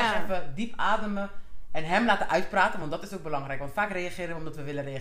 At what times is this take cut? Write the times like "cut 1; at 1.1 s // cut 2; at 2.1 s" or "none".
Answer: none